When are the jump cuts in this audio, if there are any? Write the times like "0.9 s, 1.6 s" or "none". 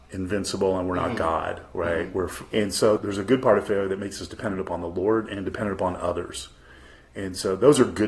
2.5 s